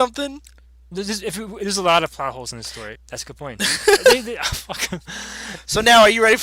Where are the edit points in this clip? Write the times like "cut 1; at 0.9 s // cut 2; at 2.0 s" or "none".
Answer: cut 1; at 3.0 s